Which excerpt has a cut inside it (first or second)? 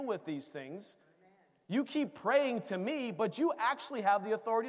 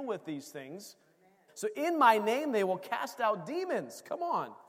second